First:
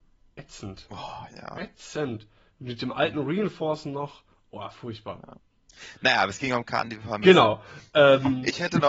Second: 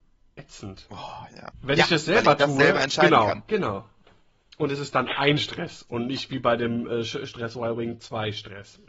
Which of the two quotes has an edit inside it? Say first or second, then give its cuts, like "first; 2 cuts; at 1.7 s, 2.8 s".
second; 1 cut; at 1.5 s